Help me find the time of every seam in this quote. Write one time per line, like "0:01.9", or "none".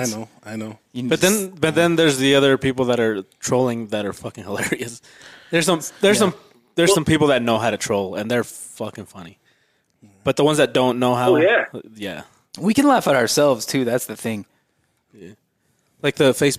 none